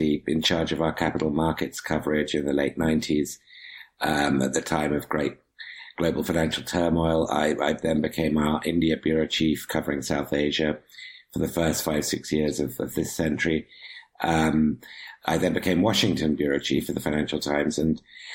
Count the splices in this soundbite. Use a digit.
0